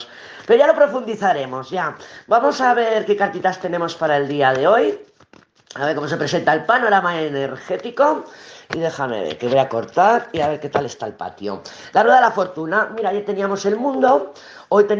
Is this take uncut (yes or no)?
yes